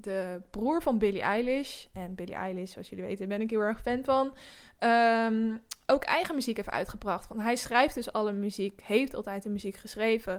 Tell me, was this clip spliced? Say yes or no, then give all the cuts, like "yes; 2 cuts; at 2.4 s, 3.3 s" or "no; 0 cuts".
no; 0 cuts